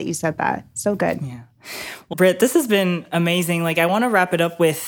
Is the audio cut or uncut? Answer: cut